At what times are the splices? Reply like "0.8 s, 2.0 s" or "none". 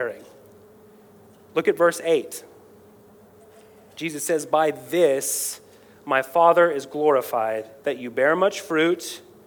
7.8 s

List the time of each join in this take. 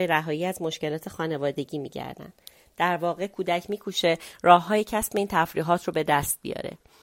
none

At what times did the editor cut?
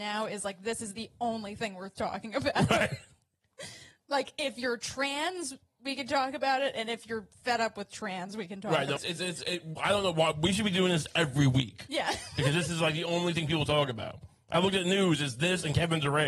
9.0 s

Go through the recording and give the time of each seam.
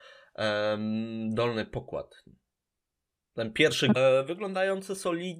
4.0 s

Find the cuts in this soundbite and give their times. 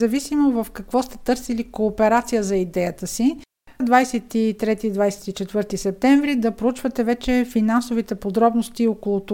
3.8 s

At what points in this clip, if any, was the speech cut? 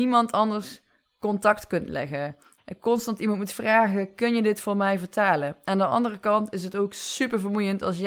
2.6 s

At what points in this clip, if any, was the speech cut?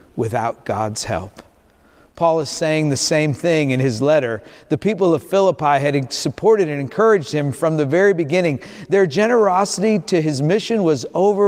none

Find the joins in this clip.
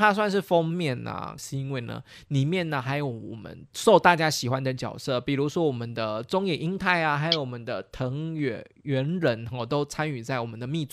1.4 s

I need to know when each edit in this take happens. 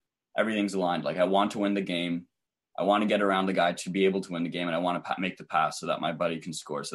none

